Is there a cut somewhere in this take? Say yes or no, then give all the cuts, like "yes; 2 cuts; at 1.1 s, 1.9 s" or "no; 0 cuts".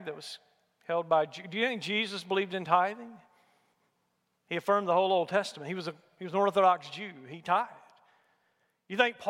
no; 0 cuts